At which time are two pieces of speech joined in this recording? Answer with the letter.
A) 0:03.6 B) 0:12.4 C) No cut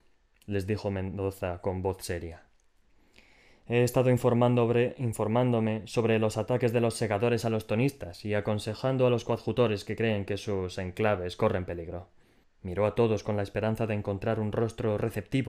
B